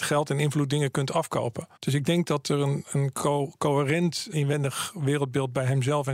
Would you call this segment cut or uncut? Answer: cut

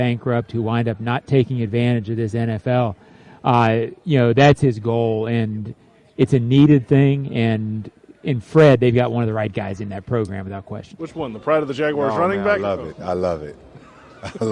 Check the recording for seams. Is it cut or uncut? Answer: cut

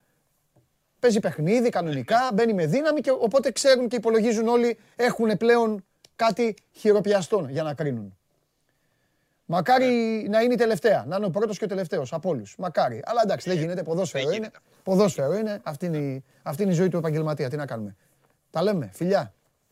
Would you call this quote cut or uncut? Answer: uncut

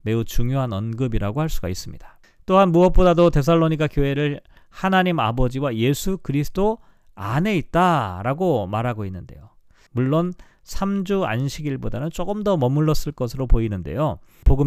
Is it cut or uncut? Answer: cut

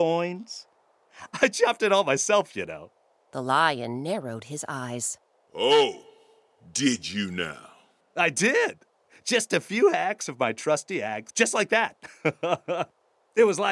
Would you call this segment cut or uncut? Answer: cut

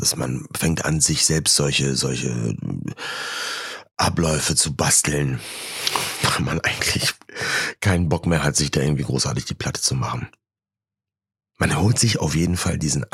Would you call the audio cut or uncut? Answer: uncut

